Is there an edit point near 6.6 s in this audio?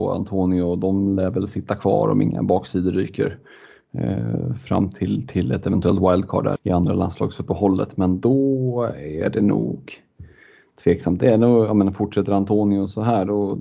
yes; 1 cut; at 6.6 s

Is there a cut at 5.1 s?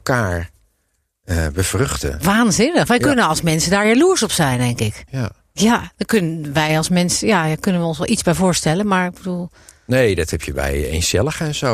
yes; 1 cut; at 5.1 s

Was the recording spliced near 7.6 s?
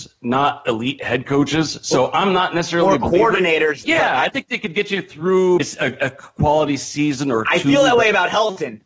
no; 2 cuts; at 3.8 s, 5.6 s

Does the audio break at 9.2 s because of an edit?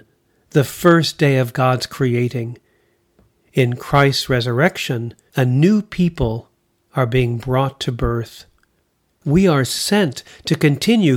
yes; 2 cuts; at 5.3 s, 9.2 s

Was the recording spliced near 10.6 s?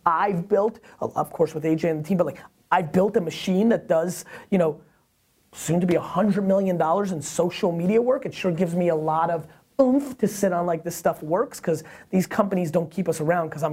no; 0 cuts

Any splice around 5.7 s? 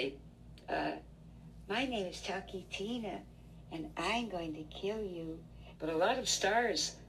yes; 1 cut; at 5.7 s

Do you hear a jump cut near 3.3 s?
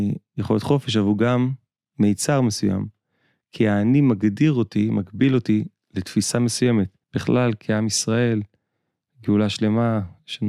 no; 1 cut; at 7.0 s

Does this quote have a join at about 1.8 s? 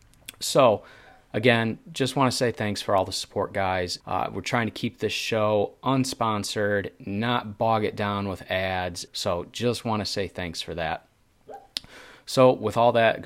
no; 2 cuts; at 4.0 s, 9.1 s

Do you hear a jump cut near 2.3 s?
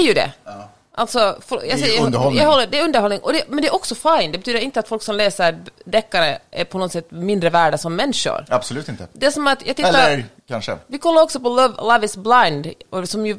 no; 0 cuts

